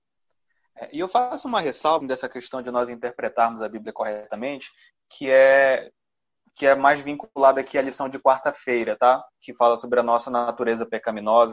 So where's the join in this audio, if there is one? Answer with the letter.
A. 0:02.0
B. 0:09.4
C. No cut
A